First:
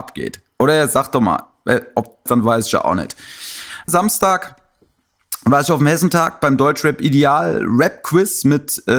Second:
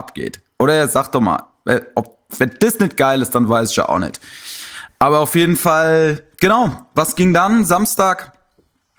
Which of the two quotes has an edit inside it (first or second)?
first